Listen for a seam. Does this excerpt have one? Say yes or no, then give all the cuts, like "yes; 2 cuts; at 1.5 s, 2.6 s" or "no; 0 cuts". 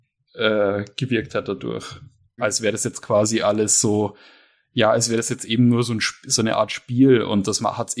yes; 1 cut; at 2.4 s